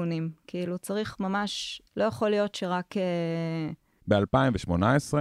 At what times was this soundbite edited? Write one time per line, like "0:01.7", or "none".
0:01.9
0:04.0